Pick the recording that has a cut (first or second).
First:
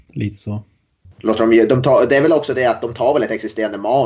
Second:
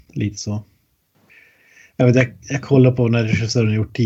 first